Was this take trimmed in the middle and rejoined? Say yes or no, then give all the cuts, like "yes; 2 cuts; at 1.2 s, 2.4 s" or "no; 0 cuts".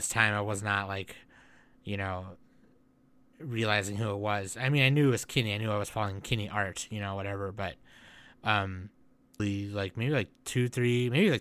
yes; 1 cut; at 9.4 s